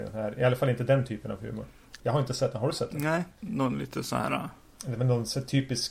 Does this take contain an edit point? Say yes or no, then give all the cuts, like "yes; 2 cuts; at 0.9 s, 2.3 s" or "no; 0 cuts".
yes; 1 cut; at 2.0 s